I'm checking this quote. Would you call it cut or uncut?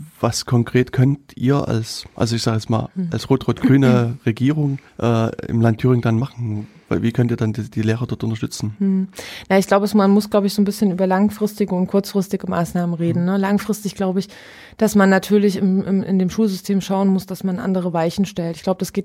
cut